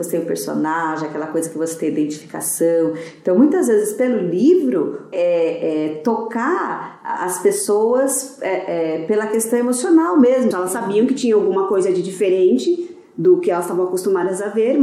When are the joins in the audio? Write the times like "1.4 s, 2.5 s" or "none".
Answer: 5.1 s, 10.5 s